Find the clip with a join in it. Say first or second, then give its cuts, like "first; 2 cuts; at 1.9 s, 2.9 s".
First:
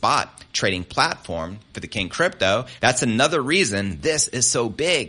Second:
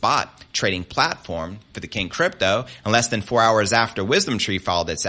first; 1 cut; at 2.8 s